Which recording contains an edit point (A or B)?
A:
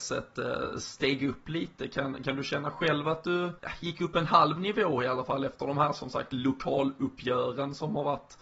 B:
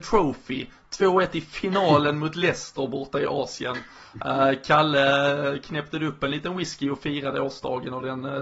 A